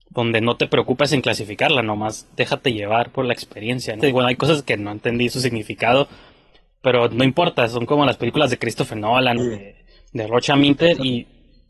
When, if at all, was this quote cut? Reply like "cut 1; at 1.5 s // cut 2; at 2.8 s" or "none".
cut 1; at 4.0 s // cut 2; at 9.4 s